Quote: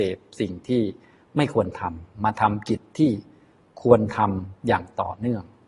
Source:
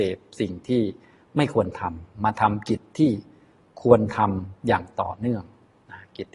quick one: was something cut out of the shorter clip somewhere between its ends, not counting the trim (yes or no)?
no